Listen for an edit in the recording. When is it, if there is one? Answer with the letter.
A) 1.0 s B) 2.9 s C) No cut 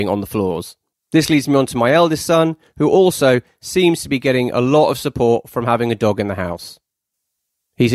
A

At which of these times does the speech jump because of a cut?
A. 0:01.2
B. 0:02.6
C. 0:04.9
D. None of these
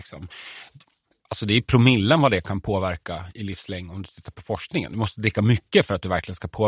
D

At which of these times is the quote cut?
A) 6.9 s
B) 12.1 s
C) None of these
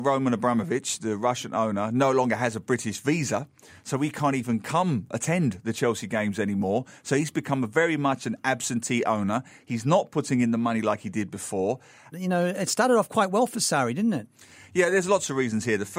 B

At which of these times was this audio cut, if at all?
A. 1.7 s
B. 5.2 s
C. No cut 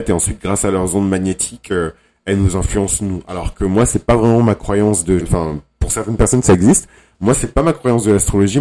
B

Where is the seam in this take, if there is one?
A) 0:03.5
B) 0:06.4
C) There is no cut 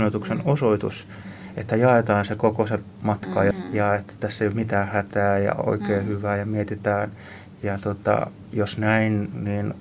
A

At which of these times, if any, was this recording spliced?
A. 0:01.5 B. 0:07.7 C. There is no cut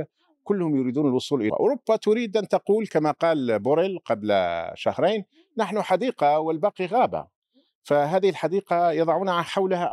A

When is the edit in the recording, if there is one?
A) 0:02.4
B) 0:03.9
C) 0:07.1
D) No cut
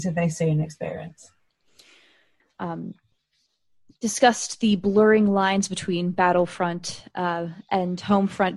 A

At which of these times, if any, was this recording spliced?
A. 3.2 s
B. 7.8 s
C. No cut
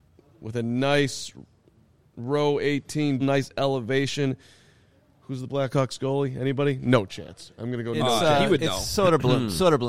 A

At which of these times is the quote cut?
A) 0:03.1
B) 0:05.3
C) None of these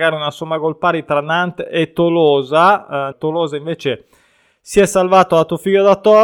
A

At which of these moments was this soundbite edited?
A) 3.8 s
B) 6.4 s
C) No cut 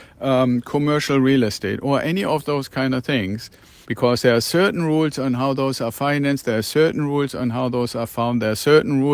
A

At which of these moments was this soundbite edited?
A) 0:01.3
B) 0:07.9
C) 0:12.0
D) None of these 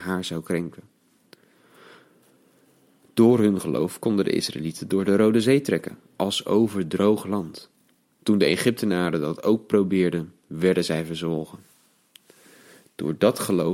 D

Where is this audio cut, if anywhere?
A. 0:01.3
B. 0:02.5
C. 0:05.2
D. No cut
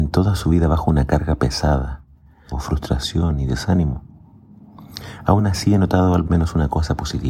B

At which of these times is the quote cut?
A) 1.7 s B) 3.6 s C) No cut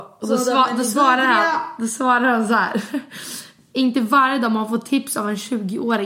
C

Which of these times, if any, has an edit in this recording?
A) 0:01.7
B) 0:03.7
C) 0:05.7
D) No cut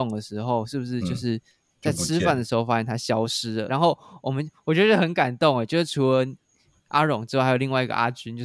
B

